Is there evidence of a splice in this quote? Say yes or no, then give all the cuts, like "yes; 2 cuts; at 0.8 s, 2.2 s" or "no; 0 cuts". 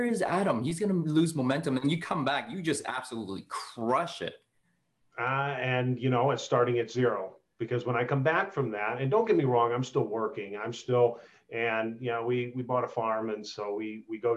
no; 0 cuts